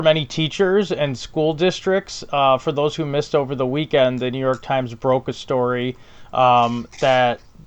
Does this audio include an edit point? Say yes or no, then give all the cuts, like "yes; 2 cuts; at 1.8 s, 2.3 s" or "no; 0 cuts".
no; 0 cuts